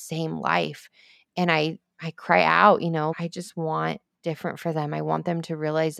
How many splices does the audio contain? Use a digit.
1